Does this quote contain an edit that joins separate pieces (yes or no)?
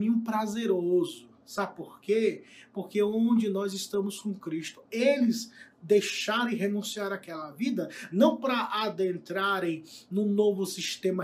no